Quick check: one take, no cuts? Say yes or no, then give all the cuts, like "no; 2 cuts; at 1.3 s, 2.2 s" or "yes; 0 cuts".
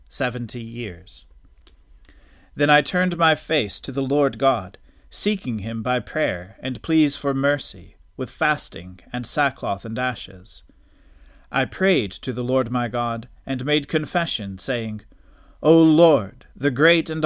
yes; 0 cuts